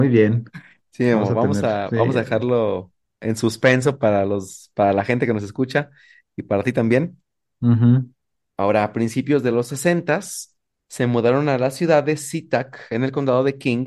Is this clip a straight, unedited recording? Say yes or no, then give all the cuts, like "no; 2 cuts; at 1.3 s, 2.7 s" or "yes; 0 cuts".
no; 1 cut; at 7.5 s